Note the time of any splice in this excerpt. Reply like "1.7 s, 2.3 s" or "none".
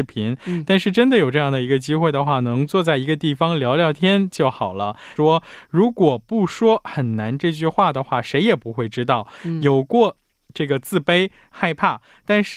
5.2 s, 11.5 s